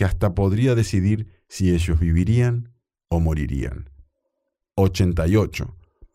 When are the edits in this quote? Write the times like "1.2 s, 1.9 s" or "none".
4.6 s